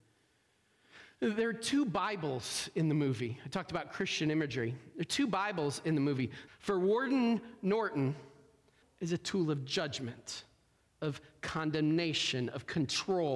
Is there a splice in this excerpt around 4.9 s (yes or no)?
no